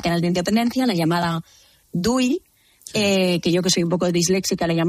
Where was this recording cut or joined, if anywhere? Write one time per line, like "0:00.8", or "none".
none